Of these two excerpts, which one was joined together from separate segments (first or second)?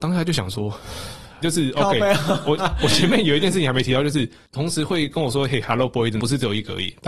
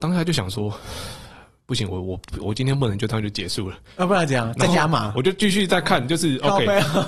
first